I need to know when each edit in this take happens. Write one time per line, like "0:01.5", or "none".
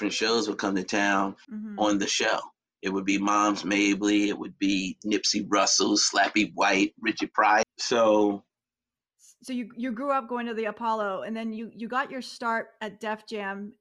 0:01.4
0:07.6